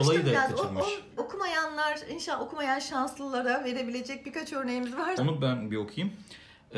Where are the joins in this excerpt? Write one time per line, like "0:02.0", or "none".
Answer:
0:01.2
0:05.2